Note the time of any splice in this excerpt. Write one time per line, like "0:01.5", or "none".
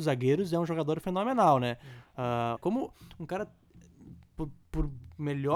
0:02.6

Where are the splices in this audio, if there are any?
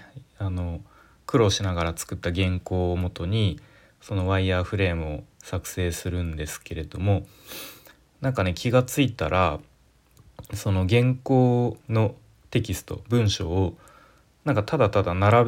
0:05.3
0:11.8

